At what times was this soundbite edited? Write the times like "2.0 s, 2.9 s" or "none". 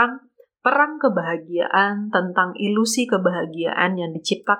none